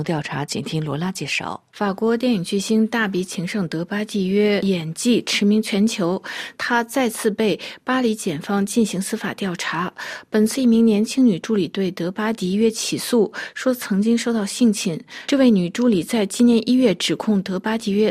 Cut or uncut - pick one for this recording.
cut